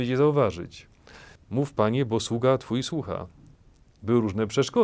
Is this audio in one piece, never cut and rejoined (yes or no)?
no